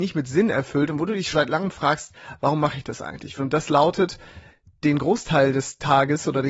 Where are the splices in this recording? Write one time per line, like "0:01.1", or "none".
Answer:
0:01.3
0:03.4